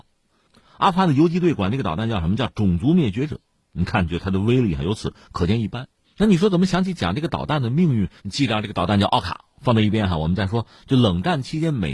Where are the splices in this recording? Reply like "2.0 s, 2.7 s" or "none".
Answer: 6.0 s, 8.2 s